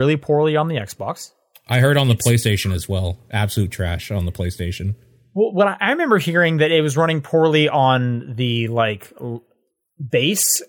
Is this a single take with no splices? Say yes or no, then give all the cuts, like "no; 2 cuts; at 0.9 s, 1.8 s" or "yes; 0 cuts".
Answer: yes; 0 cuts